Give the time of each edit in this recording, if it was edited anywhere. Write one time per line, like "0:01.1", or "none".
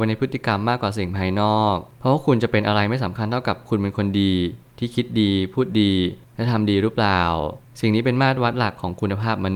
none